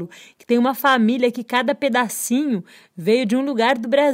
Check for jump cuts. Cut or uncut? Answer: uncut